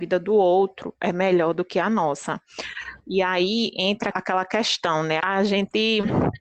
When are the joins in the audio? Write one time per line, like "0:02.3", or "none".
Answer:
0:04.1
0:05.2